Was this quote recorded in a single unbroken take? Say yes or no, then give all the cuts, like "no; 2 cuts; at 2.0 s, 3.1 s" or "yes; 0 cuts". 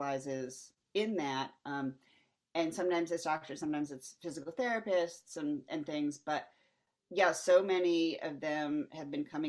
yes; 0 cuts